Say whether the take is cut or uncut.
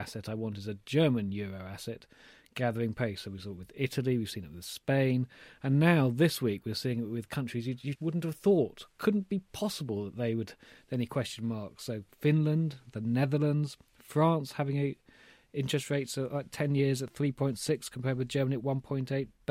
cut